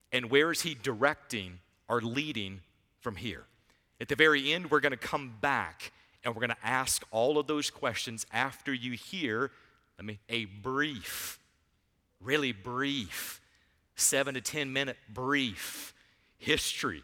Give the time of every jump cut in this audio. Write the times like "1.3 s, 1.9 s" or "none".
10.2 s